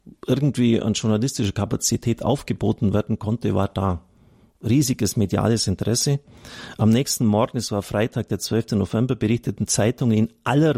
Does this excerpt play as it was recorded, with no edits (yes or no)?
yes